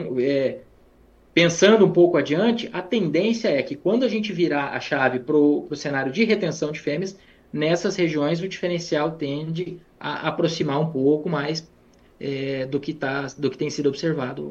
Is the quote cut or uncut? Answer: uncut